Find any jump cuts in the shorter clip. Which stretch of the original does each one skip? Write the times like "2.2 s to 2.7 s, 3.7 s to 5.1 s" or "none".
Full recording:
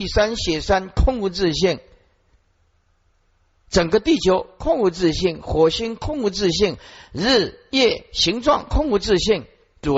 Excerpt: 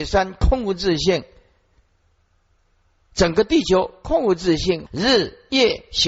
5.4 s to 7.1 s